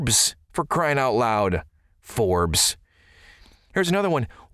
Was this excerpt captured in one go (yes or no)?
yes